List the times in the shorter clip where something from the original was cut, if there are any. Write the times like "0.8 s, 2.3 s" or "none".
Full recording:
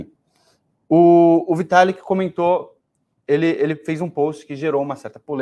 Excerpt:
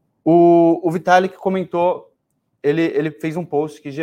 none